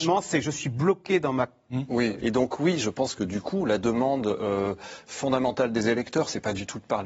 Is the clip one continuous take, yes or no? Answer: no